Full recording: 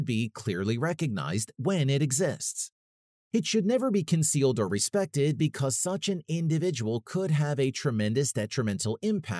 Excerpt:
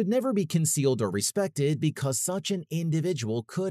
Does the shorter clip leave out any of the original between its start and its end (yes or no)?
no